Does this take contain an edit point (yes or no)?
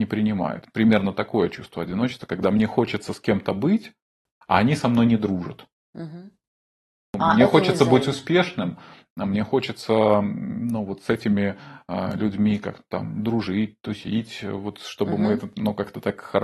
no